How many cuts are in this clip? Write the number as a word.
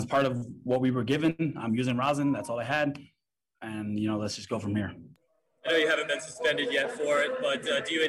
zero